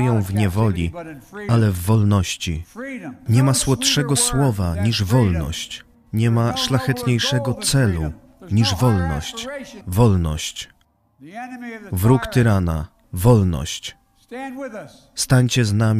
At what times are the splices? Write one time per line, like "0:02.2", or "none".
0:03.3
0:09.8
0:13.0

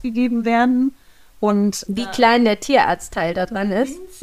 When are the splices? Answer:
0:01.9

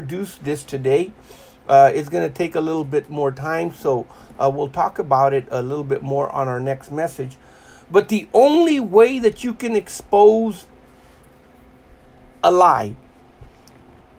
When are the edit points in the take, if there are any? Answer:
none

